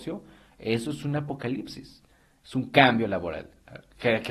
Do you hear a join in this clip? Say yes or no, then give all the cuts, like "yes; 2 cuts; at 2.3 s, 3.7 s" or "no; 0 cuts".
yes; 1 cut; at 2.4 s